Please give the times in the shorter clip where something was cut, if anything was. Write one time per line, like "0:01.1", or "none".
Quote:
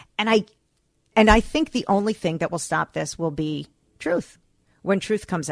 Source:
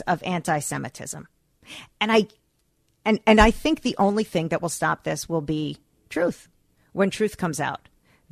0:01.1